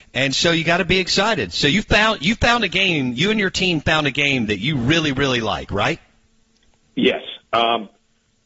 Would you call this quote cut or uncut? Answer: uncut